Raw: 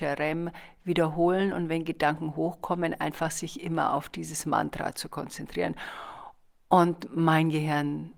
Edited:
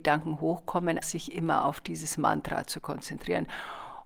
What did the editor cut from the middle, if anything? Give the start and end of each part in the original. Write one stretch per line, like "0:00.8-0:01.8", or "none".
0:03.0-0:03.3